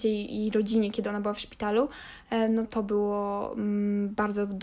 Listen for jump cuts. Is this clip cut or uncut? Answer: cut